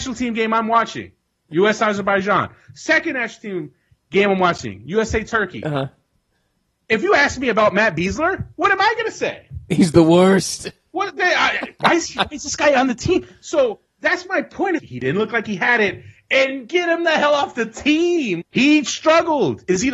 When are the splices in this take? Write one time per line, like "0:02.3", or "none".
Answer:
0:14.8
0:18.4